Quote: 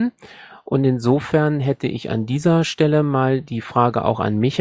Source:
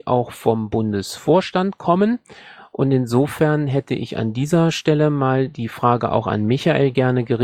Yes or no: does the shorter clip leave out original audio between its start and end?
no